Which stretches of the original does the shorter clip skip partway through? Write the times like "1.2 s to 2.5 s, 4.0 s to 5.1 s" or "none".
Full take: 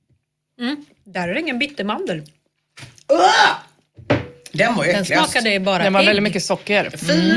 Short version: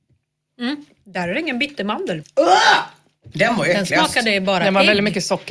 2.2 s to 2.9 s, 4.0 s to 4.5 s